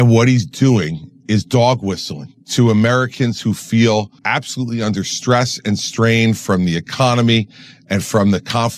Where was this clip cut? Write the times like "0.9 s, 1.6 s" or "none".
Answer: 4.2 s